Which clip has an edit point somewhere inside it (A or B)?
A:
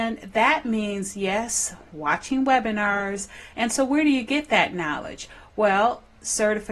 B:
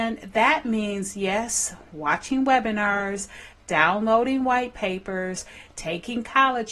A